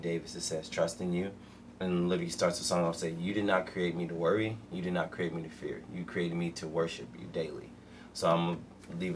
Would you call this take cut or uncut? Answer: uncut